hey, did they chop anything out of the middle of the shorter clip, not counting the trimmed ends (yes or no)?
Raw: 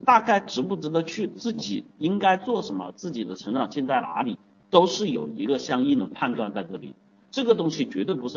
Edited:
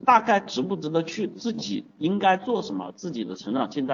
no